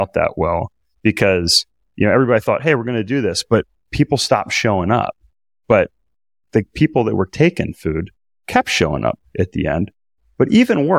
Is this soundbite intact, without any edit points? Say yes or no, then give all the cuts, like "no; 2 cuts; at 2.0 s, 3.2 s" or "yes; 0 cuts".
yes; 0 cuts